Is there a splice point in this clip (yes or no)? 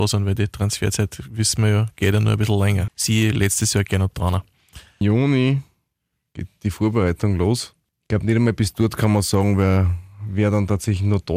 yes